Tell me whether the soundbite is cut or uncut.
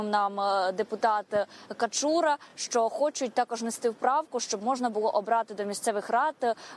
uncut